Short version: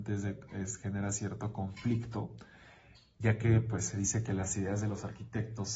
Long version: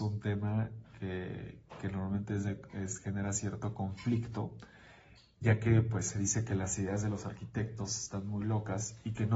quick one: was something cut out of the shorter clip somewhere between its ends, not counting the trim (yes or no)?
no